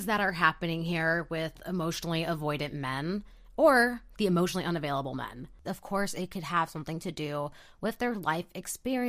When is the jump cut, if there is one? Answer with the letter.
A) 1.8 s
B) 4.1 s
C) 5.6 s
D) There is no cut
C